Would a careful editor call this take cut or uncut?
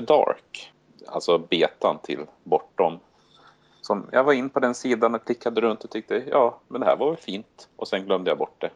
uncut